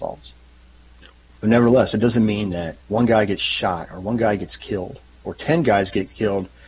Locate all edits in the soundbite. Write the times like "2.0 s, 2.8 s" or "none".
2.8 s

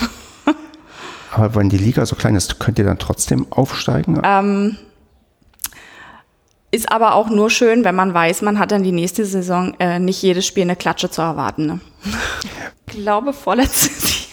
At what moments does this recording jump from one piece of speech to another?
4.2 s, 12.7 s

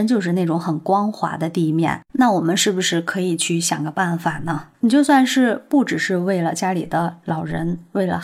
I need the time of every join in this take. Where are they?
4.7 s

